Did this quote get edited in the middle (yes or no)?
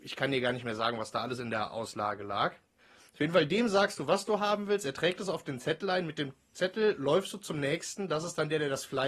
no